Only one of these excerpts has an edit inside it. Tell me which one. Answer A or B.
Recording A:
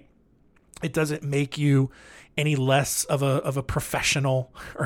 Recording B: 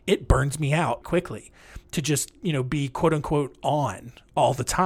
B